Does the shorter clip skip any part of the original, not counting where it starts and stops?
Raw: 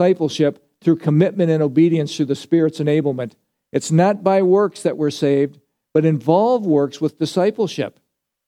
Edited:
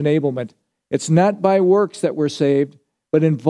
no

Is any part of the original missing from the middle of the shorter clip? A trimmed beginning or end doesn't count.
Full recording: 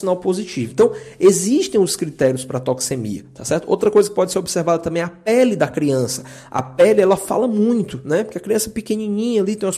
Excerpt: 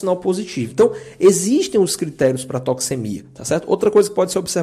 no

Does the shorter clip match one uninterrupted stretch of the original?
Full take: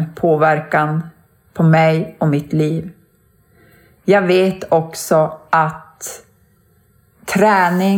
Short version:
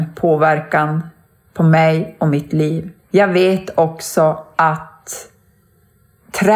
no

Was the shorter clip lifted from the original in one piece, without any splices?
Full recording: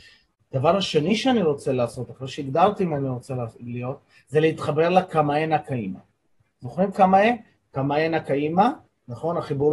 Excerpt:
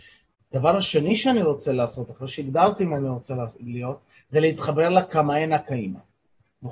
yes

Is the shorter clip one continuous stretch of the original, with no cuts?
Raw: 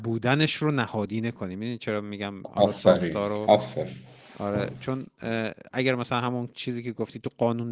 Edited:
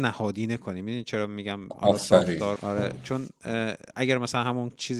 no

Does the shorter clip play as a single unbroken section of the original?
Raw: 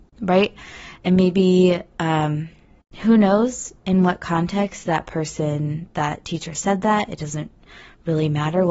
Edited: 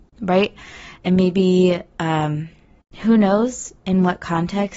yes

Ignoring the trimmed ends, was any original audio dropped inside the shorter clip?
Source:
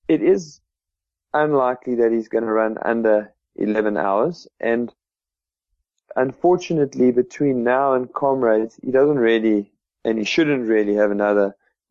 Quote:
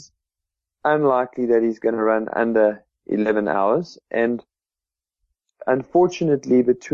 no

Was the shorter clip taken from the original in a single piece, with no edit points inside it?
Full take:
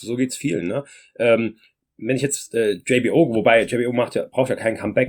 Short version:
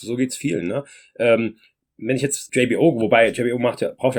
no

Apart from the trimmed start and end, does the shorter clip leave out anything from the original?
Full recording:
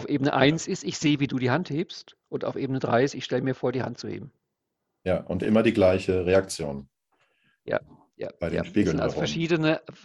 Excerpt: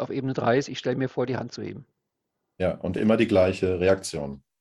no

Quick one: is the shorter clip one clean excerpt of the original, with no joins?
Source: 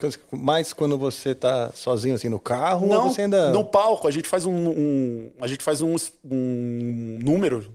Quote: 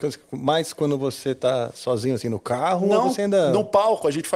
yes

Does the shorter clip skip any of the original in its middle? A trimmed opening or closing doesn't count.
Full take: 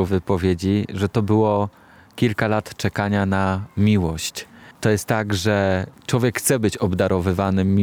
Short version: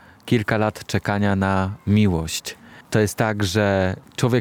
no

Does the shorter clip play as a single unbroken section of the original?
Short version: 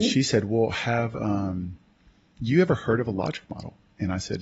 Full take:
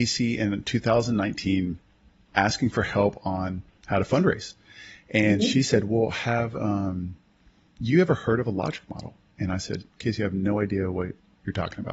yes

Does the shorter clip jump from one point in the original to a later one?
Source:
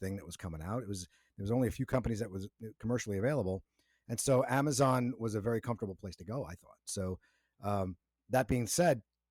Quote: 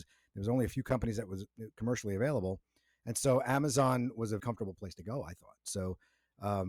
yes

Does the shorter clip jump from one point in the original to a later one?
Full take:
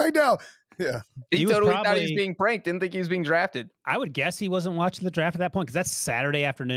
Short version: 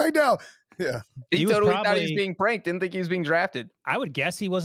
no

